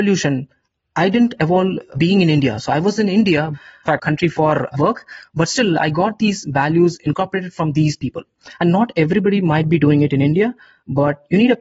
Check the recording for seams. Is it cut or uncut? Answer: cut